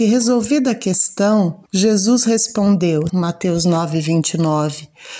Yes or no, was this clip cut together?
yes